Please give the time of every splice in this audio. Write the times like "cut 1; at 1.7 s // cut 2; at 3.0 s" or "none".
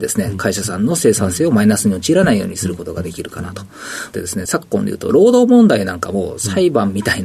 cut 1; at 4.1 s